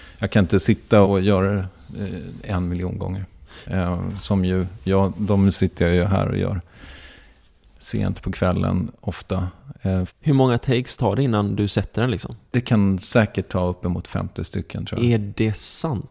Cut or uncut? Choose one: cut